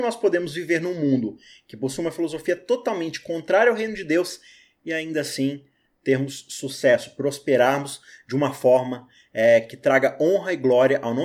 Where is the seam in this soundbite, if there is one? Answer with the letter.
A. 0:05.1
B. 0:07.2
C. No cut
C